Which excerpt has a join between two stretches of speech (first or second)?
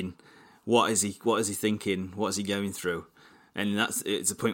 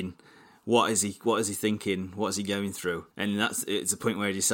second